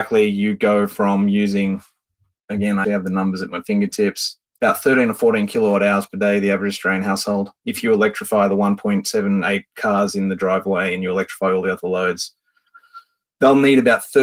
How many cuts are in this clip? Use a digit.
2